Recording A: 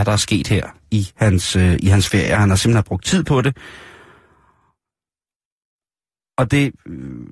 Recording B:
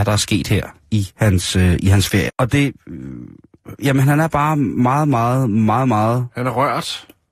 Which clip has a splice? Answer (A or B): B